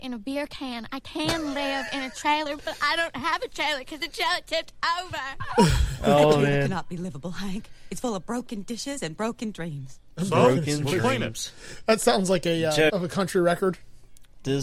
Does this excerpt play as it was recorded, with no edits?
no; 1 cut; at 12.9 s

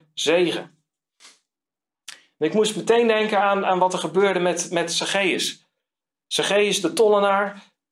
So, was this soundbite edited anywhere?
no; 0 cuts

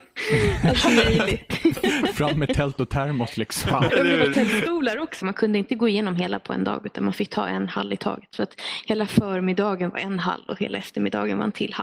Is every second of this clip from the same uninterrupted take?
no; 2 cuts; at 3.9 s, 5.2 s

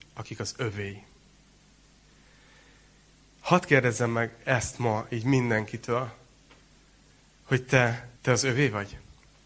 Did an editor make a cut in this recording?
yes; 1 cut; at 8.2 s

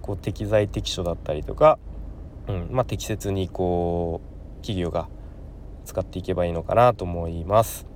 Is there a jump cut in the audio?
no; 0 cuts

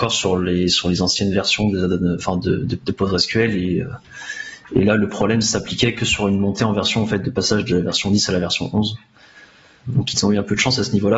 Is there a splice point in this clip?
no; 0 cuts

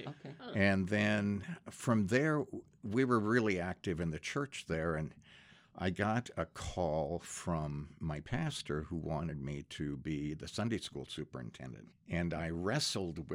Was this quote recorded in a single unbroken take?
no; 1 cut; at 11.9 s

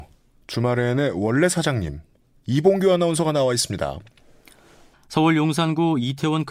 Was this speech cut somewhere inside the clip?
yes; 1 cut; at 4.9 s

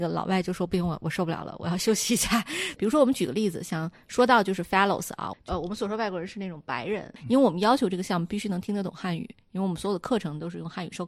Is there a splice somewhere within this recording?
yes; 3 cuts; at 2.8 s, 5.3 s, 7.2 s

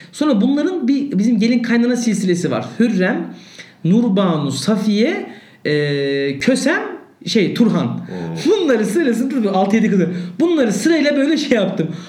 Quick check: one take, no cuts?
yes; 0 cuts

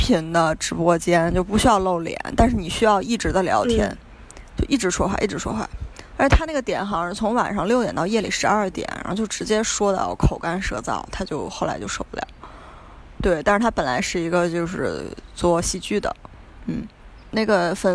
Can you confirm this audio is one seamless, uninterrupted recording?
no; 1 cut; at 13.2 s

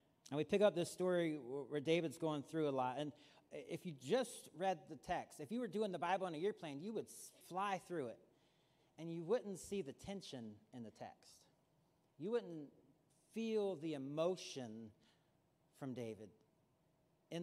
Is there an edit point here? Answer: yes; 1 cut; at 7.4 s

